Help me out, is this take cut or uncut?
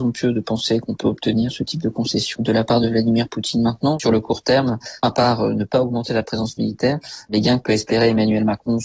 uncut